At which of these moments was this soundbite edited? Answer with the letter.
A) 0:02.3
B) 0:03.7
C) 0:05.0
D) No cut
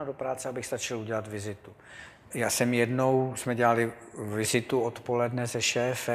A